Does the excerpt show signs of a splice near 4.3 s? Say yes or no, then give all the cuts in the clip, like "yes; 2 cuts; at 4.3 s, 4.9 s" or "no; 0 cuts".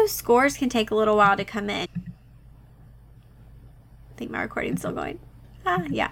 no; 1 cut; at 1.9 s